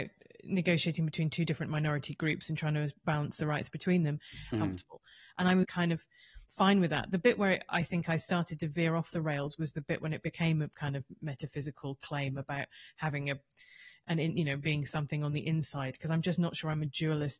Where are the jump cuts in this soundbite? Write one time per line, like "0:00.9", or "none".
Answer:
0:04.5
0:05.6

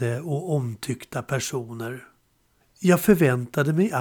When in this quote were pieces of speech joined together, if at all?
none

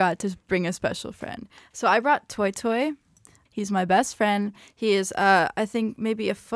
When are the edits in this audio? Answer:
0:03.4

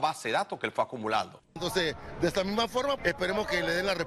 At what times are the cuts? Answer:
0:01.6
0:03.0

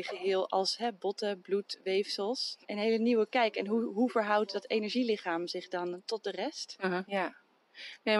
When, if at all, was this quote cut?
0:02.6
0:07.0

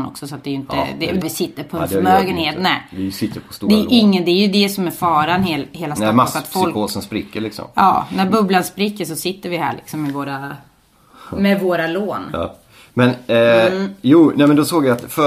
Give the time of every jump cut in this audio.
0:01.2

